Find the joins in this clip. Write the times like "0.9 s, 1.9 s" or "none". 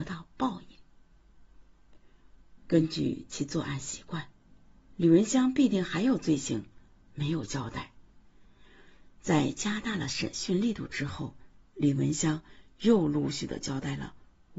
2.6 s